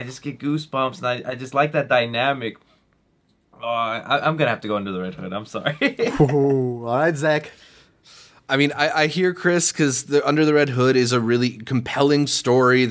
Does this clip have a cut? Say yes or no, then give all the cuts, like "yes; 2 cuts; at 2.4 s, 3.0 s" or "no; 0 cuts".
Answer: no; 0 cuts